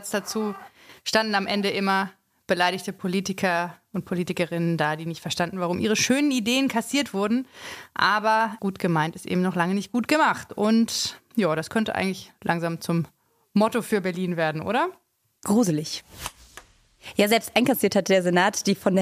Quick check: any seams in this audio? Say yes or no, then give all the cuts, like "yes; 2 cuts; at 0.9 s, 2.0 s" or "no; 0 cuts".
no; 0 cuts